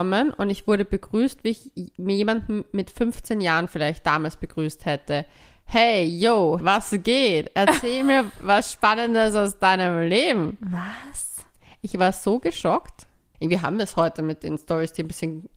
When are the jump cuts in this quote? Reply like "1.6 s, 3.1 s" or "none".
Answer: 6.6 s, 13.3 s